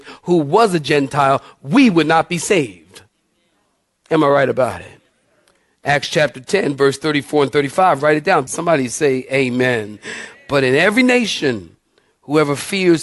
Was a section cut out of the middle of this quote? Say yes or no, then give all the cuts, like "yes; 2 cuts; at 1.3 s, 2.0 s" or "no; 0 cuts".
yes; 1 cut; at 8.5 s